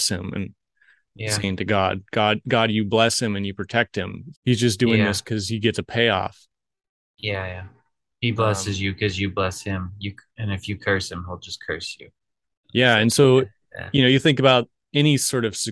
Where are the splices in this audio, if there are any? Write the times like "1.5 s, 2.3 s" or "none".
4.3 s